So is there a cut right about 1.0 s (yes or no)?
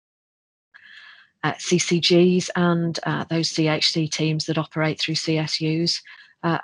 no